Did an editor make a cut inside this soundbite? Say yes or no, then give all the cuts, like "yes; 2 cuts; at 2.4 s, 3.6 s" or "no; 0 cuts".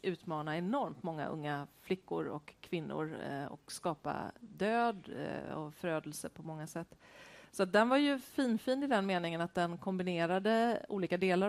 no; 0 cuts